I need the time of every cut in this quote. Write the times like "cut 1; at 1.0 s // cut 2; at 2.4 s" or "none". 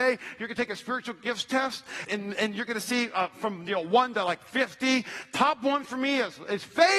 cut 1; at 2.1 s